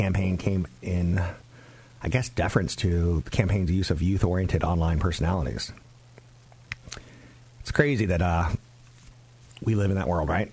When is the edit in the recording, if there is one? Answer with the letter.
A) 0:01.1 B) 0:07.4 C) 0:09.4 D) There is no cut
D